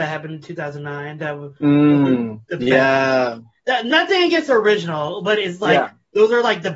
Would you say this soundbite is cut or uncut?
uncut